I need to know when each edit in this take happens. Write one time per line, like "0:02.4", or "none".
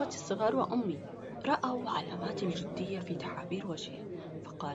none